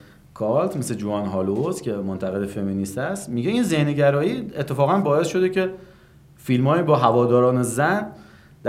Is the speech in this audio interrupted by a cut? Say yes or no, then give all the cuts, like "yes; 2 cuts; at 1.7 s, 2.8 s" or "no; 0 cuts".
no; 0 cuts